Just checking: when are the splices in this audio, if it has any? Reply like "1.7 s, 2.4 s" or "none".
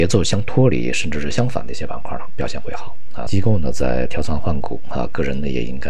3.3 s